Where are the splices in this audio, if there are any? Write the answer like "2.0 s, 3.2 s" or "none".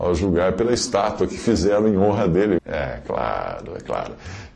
2.6 s